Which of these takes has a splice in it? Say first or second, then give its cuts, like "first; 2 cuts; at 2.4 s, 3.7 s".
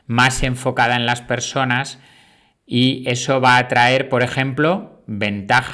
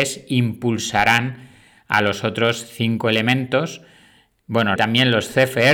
second; 1 cut; at 4.8 s